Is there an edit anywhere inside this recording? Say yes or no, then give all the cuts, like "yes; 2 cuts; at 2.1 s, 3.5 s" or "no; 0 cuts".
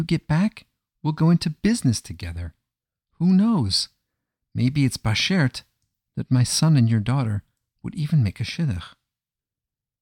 no; 0 cuts